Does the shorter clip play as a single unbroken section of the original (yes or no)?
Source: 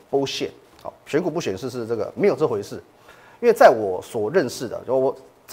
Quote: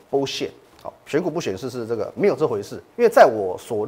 no